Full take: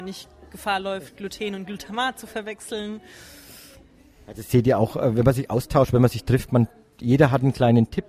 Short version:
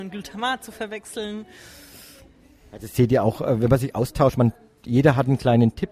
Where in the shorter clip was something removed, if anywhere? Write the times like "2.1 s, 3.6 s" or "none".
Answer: 4.3 s